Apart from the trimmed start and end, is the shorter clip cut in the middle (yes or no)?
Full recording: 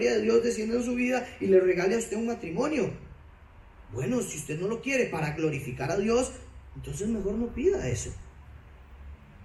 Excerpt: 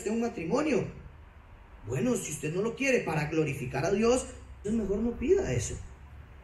yes